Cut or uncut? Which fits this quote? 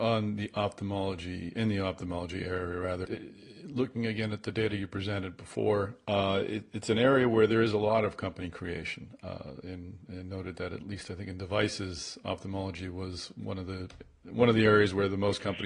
cut